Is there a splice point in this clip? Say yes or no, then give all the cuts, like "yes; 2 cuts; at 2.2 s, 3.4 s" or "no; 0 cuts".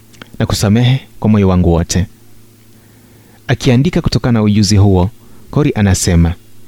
no; 0 cuts